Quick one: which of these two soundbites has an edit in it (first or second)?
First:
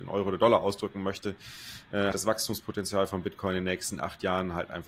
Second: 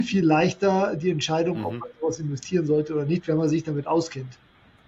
first